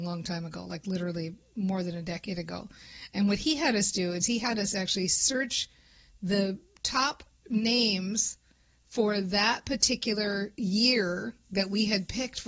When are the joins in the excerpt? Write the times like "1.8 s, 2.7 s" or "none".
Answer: none